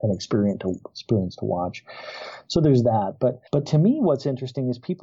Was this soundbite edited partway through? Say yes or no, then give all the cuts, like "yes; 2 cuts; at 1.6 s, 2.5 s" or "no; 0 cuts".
yes; 1 cut; at 3.5 s